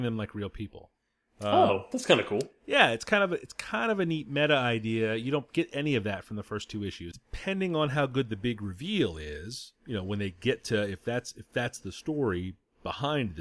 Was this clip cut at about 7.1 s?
yes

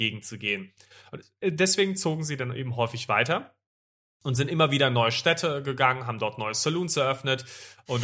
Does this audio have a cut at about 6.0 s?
no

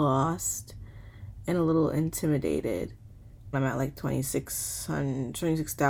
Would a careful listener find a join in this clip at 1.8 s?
no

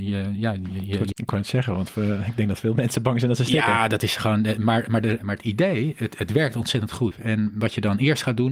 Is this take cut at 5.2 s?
yes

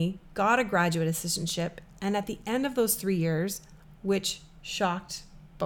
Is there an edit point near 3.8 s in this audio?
yes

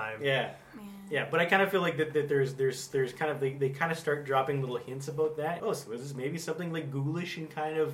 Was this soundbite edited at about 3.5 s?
no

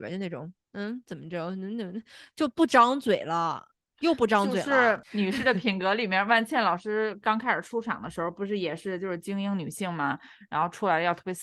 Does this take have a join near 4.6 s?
no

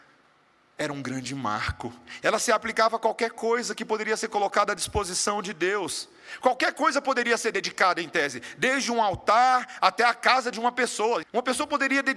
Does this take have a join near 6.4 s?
no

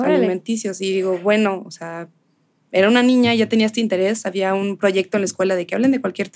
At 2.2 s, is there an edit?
no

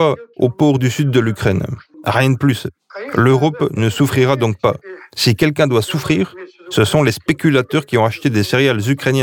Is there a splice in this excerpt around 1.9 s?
yes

